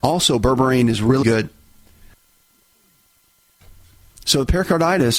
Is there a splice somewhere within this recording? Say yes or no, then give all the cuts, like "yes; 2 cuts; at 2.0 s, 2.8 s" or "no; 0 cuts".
yes; 2 cuts; at 1.2 s, 4.2 s